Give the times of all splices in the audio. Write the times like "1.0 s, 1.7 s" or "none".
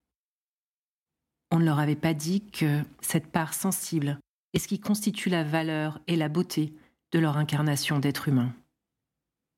none